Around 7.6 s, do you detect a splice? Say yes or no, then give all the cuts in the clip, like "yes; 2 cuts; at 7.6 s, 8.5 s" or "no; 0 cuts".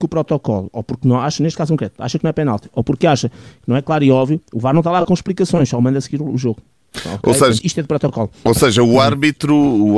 yes; 1 cut; at 7.6 s